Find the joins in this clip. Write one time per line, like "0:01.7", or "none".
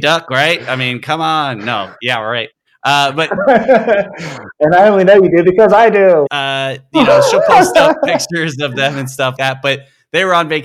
0:06.3
0:09.4

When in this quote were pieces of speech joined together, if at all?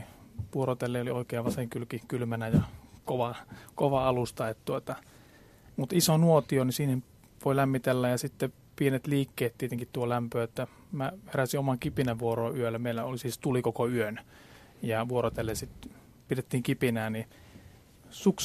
none

